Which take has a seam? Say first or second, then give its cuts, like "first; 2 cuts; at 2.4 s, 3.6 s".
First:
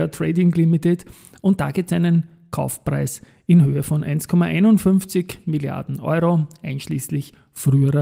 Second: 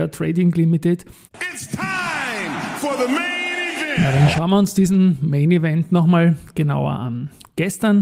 second; 1 cut; at 1.3 s